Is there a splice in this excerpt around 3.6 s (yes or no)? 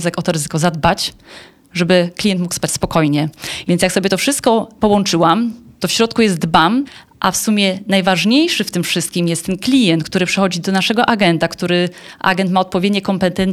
yes